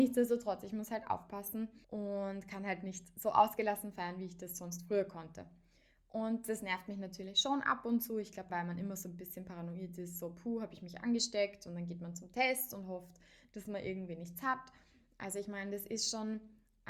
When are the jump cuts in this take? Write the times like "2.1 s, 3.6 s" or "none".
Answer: 1.8 s, 8.5 s

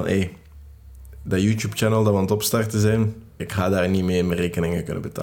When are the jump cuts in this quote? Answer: 3.4 s

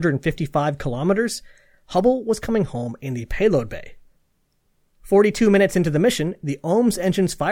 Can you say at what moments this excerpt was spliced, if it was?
4.9 s

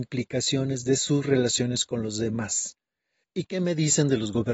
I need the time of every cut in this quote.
3.2 s

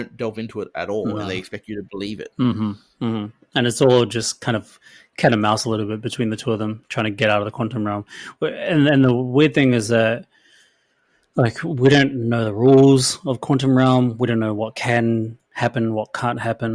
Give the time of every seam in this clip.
none

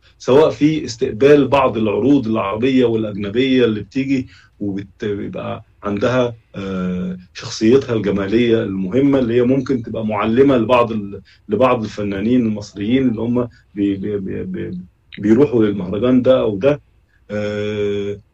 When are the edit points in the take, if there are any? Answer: none

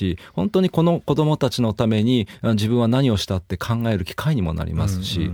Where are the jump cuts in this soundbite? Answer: none

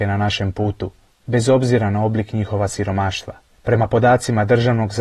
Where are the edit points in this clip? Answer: none

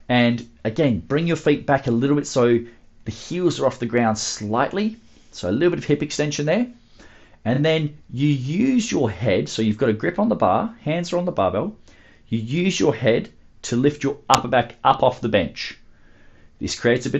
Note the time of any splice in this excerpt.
none

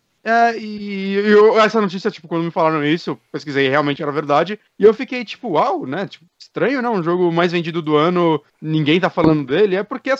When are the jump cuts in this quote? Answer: none

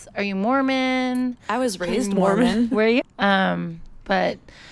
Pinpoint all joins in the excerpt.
3.0 s

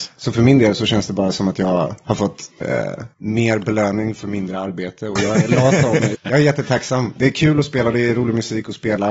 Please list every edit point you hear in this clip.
6.1 s

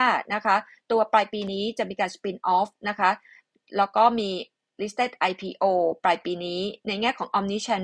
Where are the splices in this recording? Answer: none

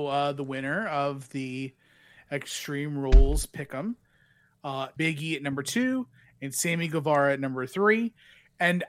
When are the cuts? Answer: 5.0 s

